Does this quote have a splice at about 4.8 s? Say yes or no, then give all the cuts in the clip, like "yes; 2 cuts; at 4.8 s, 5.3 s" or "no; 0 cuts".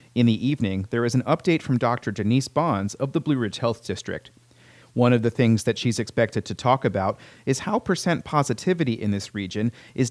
no; 0 cuts